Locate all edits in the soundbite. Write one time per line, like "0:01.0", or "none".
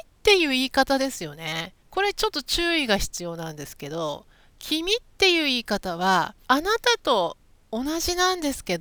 0:01.8
0:06.4